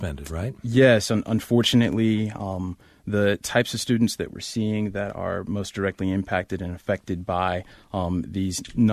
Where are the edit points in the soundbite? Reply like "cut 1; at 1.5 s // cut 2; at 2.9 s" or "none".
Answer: none

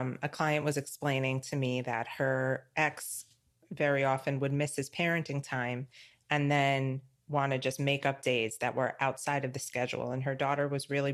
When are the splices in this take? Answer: none

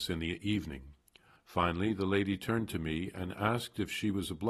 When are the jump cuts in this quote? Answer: cut 1; at 1.4 s

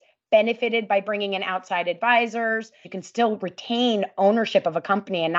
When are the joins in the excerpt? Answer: cut 1; at 2.8 s

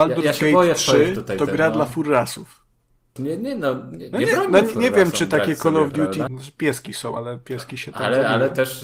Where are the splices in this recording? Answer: cut 1; at 3.2 s // cut 2; at 6.3 s

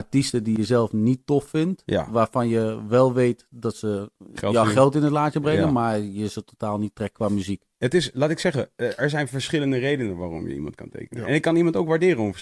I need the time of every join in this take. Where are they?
none

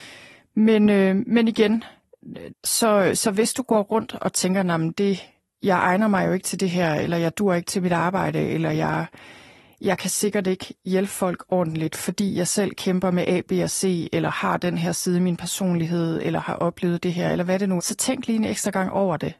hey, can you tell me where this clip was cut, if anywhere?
cut 1; at 2.5 s // cut 2; at 17.8 s

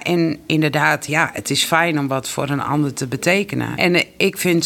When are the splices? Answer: cut 1; at 3.8 s

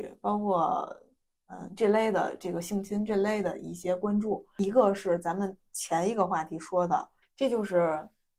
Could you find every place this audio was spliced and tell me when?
cut 1; at 7.2 s

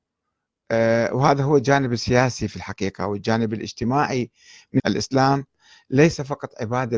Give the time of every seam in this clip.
cut 1; at 4.8 s

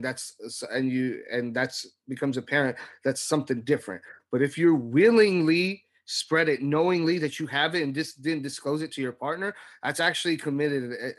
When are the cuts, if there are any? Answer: none

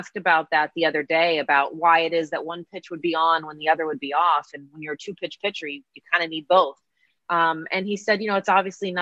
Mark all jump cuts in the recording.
none

